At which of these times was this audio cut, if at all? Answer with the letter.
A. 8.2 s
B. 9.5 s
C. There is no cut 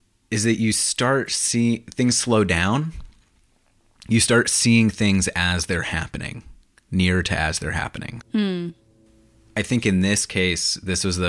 A